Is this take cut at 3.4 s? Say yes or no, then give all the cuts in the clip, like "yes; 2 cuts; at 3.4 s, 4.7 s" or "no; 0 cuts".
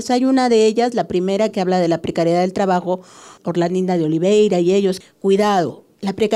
yes; 2 cuts; at 3.4 s, 5.0 s